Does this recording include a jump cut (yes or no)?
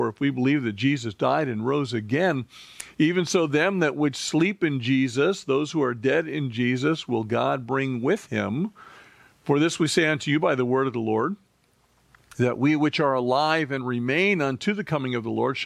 no